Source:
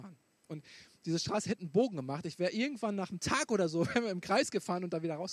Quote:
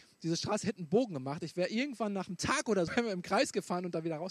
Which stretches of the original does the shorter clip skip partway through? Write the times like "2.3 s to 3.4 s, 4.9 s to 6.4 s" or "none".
3.7 s to 3.9 s

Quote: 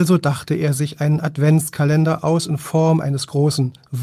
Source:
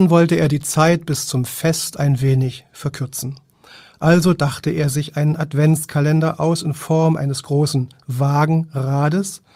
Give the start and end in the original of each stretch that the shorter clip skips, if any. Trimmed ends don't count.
none

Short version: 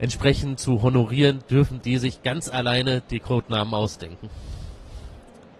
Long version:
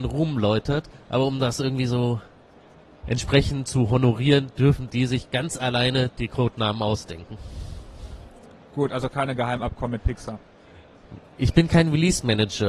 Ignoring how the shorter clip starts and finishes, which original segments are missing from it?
none

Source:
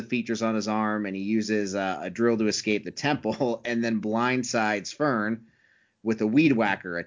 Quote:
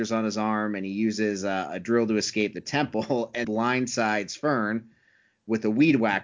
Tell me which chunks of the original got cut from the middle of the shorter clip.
3.7 s to 4.0 s

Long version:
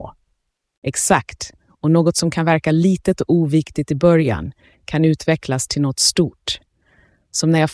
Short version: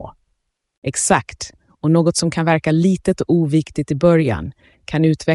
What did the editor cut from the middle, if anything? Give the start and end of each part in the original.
none

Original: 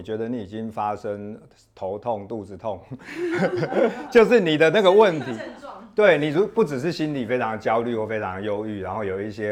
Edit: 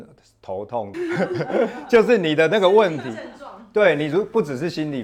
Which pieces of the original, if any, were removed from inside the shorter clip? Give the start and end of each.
2.3 s to 3.2 s

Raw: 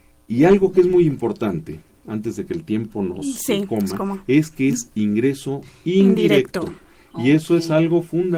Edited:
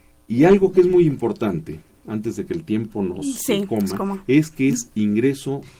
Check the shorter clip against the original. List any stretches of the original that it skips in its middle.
none

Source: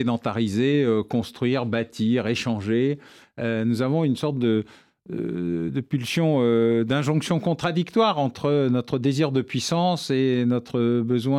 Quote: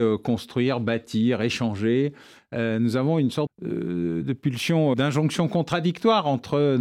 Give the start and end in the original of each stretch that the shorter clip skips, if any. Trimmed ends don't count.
4.3 s to 4.9 s, 6.4 s to 6.8 s

